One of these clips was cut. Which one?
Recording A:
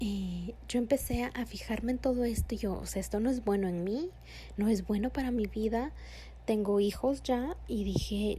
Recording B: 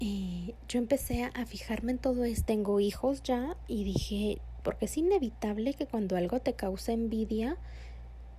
B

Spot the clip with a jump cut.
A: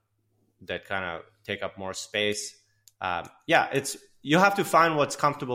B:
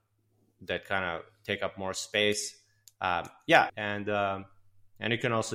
B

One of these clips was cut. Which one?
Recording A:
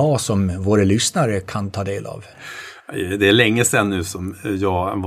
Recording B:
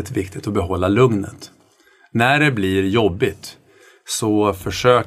A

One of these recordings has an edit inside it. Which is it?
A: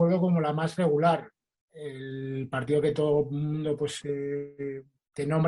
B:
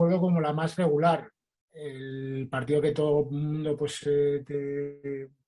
A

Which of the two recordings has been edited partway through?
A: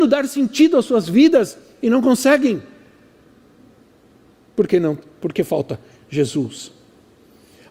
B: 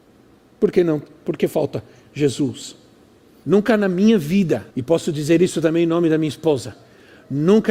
B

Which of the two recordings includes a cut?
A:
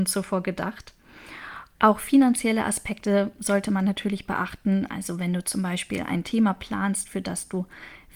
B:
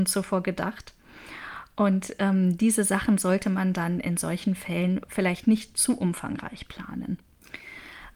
A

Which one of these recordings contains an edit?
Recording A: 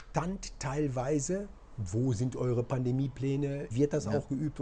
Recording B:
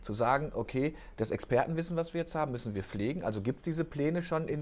A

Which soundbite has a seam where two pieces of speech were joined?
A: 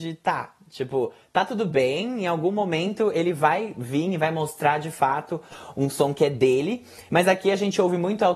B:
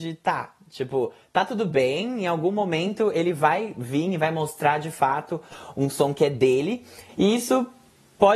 B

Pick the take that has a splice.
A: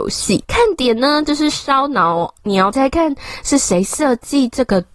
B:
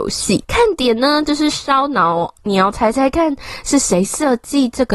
A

